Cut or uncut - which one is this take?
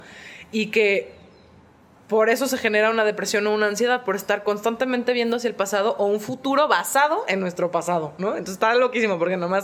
uncut